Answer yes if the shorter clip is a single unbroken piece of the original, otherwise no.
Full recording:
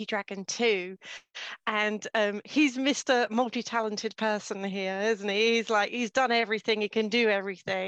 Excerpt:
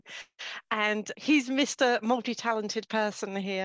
no